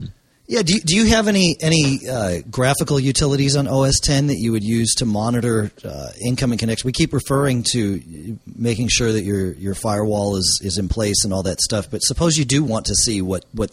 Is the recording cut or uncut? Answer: uncut